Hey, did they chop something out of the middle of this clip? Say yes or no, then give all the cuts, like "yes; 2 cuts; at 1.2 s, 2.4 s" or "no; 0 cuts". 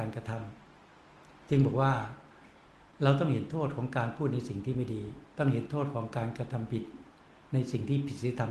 no; 0 cuts